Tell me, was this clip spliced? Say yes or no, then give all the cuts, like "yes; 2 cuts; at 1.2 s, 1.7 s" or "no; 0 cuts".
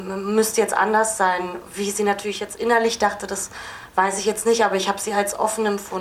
no; 0 cuts